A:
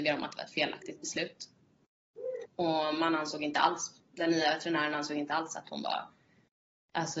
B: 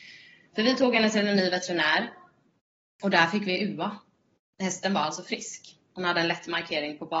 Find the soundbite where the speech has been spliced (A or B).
A